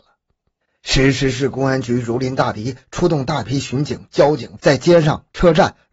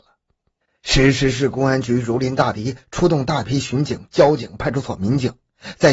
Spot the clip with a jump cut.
first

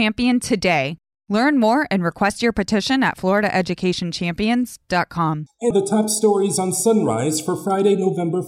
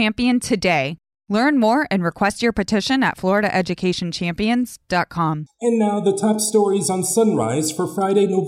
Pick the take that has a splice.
first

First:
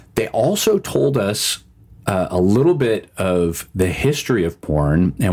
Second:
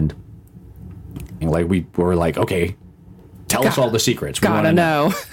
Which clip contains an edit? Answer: second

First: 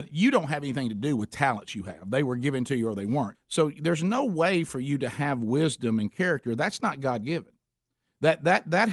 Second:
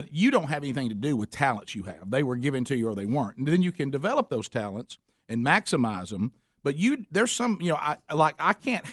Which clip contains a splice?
first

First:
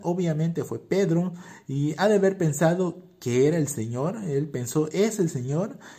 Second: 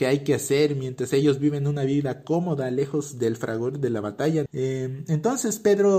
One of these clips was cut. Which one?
second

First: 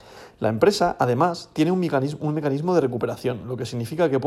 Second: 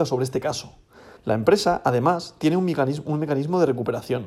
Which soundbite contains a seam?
second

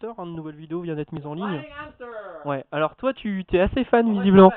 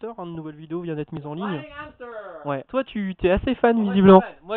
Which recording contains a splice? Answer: second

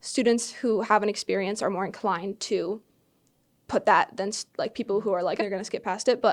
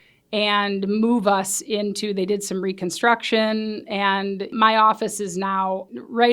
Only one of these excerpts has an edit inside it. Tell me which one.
first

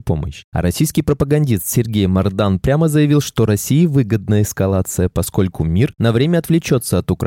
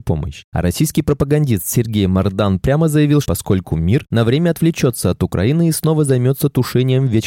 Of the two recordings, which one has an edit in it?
second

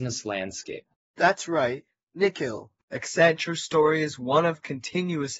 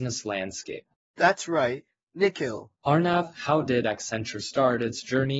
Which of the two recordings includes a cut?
second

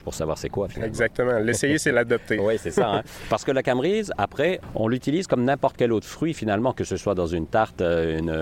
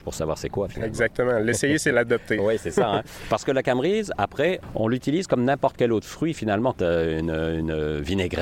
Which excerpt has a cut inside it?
second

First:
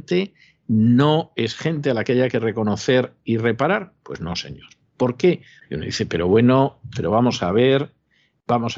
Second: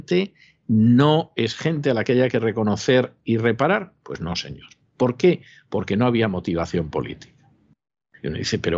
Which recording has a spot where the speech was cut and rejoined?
first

